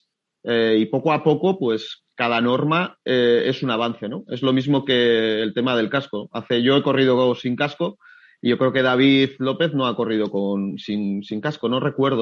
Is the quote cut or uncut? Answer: uncut